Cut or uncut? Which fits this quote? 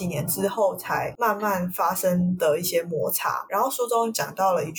uncut